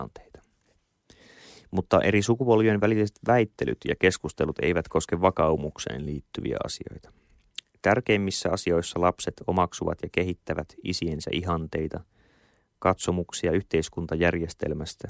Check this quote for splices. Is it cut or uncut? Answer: uncut